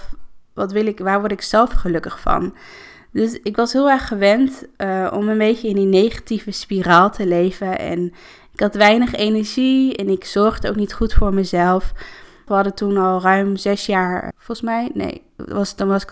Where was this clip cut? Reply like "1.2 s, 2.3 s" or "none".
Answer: 12.5 s, 14.3 s